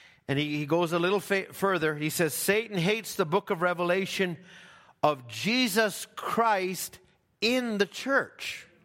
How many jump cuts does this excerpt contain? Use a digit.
0